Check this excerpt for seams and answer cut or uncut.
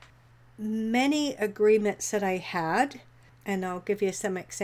uncut